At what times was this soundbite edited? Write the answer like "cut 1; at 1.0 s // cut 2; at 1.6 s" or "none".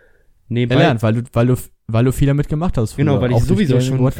none